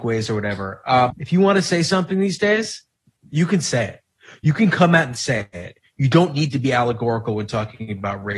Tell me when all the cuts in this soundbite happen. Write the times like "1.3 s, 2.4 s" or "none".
1.1 s